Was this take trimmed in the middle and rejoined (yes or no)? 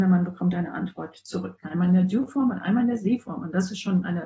yes